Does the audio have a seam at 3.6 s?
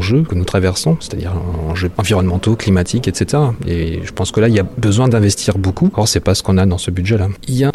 no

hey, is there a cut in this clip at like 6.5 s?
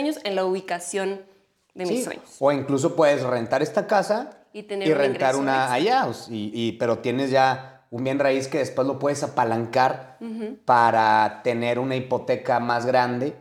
yes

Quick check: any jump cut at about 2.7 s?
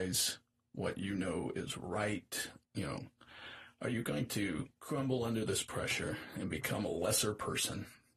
yes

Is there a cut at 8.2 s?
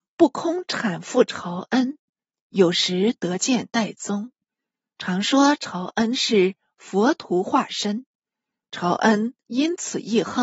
no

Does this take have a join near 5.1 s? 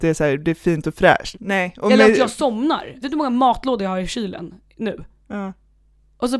no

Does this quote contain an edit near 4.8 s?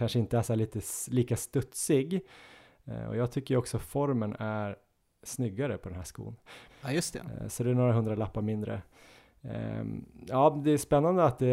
no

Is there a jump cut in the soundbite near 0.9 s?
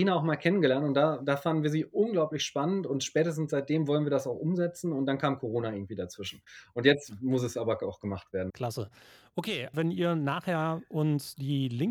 no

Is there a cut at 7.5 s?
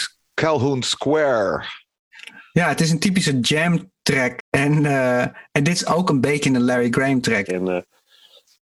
yes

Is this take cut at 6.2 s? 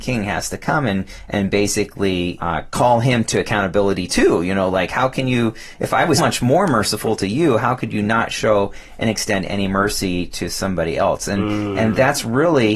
yes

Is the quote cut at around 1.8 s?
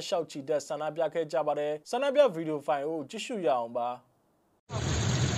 yes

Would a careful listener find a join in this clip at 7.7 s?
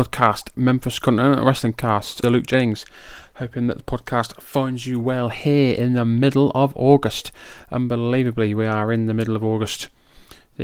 no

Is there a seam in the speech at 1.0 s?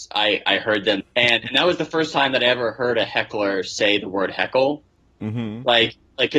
yes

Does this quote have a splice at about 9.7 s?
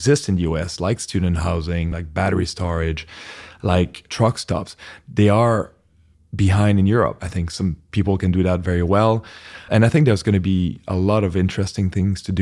yes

